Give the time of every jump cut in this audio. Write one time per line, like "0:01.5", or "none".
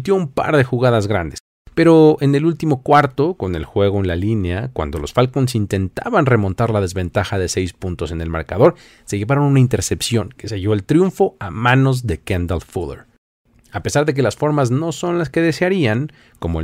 none